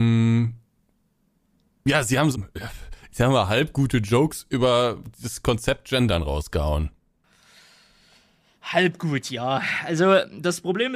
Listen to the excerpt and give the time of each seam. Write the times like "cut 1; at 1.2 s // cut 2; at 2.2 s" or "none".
cut 1; at 2.3 s